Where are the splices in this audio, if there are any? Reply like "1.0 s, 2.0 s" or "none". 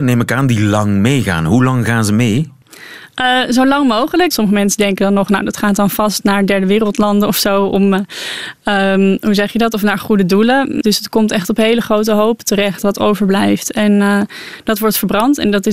4.3 s, 10.8 s